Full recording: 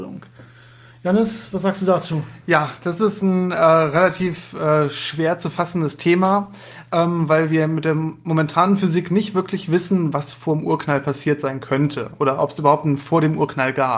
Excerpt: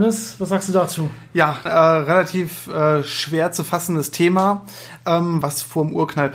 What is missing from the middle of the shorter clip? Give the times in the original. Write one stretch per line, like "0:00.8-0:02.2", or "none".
0:02.8-0:03.5
0:07.3-0:10.1